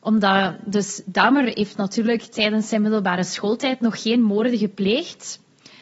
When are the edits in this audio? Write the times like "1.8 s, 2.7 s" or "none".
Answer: none